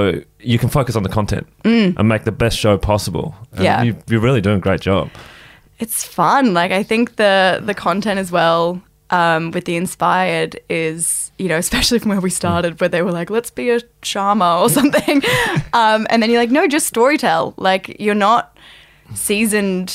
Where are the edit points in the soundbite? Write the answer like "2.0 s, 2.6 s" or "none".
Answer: none